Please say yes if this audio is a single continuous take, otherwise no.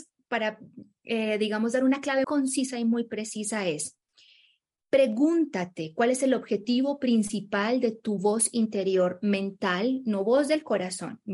no